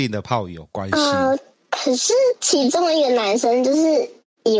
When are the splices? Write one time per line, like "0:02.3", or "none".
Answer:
none